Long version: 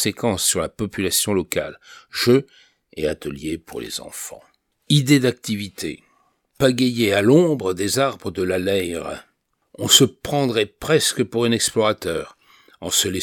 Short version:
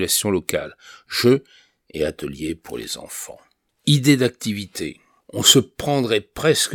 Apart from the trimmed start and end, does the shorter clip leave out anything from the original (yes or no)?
yes